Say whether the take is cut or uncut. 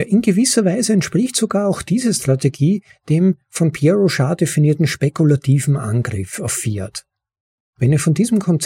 uncut